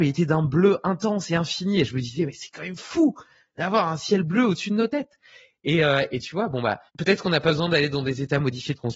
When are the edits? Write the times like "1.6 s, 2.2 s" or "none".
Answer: 6.9 s